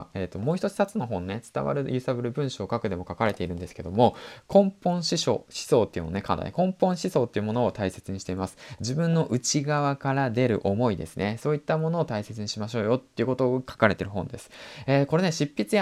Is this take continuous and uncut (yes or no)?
yes